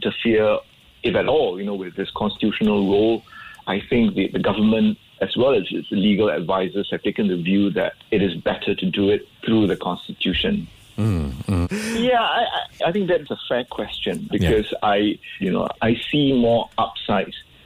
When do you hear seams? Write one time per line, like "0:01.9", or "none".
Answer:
0:11.6
0:14.3
0:15.4